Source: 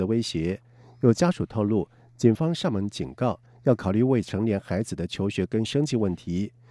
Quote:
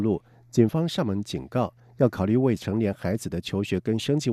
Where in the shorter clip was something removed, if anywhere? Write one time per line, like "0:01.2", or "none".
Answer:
none